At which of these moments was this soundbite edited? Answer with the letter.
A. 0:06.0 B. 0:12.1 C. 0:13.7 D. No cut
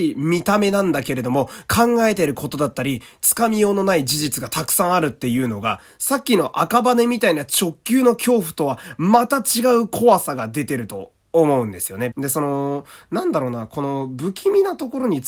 B